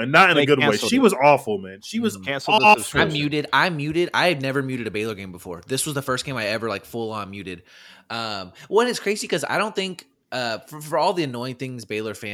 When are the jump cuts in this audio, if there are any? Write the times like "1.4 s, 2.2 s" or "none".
none